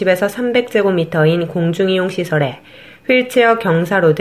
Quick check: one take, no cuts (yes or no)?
yes